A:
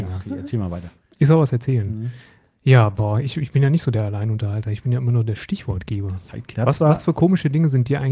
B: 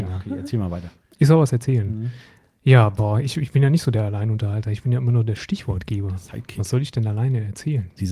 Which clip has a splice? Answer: A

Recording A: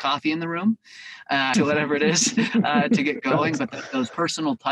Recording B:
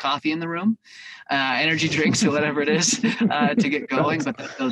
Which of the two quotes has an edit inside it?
A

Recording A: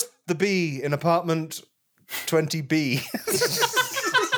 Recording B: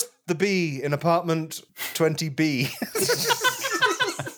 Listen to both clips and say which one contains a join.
B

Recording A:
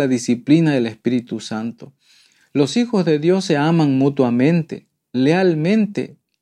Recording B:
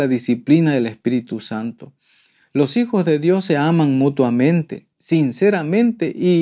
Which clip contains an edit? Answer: B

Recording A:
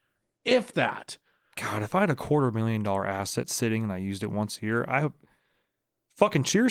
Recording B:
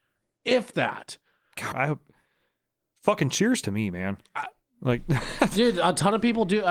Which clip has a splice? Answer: B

